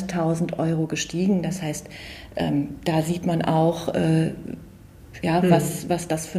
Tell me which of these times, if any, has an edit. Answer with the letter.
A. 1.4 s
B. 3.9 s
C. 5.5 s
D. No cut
D